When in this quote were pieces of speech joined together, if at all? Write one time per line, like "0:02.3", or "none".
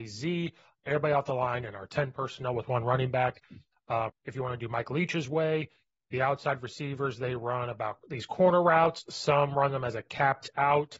0:04.1